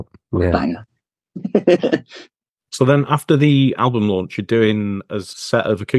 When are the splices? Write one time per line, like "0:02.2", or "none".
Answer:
none